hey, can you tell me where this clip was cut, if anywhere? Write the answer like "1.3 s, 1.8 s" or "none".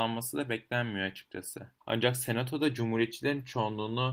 1.8 s

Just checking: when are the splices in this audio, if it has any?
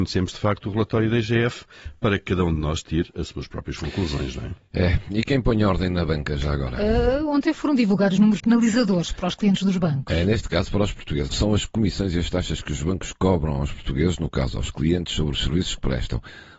8.4 s, 11.3 s

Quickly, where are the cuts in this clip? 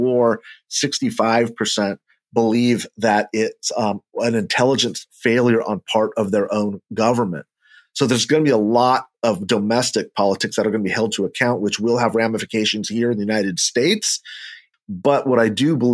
14.7 s

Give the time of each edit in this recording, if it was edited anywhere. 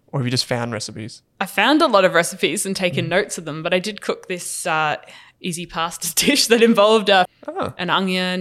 5.4 s, 7.3 s

